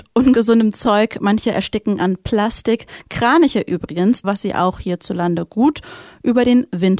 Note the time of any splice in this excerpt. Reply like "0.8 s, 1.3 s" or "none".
4.2 s